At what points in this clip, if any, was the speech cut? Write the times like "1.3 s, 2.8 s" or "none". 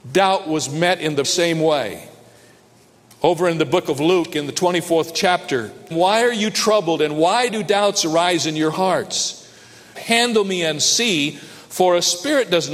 1.2 s, 5.9 s, 9.9 s